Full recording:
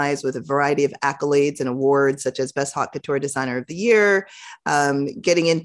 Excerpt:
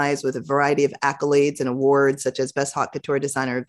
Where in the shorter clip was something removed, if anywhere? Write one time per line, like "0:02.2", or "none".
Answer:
none